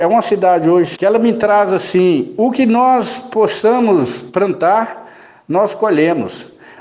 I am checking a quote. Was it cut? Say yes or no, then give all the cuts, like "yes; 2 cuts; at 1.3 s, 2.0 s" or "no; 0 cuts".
yes; 1 cut; at 0.9 s